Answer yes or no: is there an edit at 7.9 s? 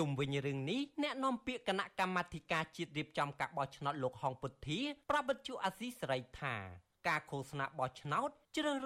no